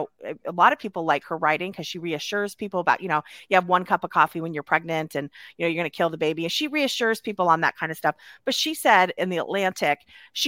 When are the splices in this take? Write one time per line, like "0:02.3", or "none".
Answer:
0:09.2